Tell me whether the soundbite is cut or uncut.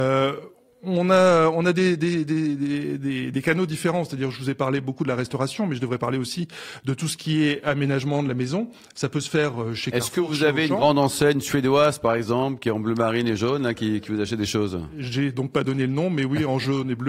uncut